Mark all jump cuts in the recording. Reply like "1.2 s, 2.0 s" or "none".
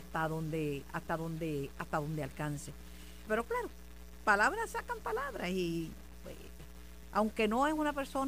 3.3 s

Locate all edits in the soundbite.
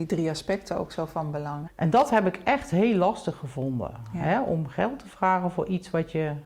1.7 s

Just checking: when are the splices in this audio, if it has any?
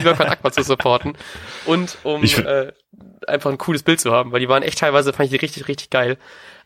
none

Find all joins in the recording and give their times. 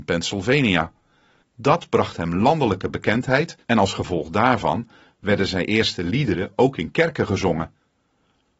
1.4 s, 3.6 s

